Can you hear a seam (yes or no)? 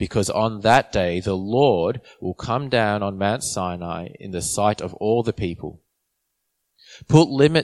no